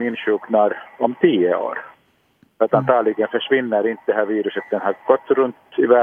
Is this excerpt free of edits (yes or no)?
yes